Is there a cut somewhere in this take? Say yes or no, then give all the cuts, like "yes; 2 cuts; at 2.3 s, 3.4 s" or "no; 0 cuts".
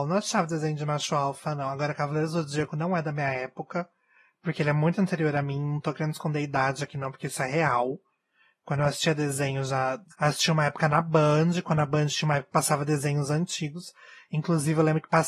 yes; 1 cut; at 10.1 s